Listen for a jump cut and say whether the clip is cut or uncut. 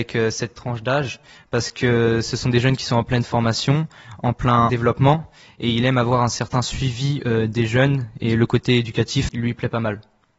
cut